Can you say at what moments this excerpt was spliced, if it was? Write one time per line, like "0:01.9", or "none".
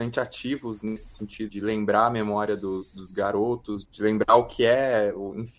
0:01.5
0:03.8